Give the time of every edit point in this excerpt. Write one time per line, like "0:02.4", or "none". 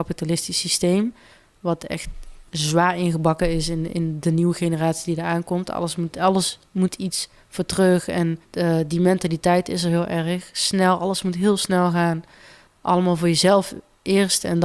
0:02.5
0:08.4